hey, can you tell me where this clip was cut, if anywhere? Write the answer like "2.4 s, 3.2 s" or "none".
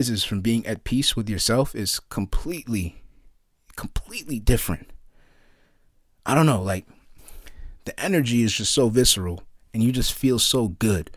none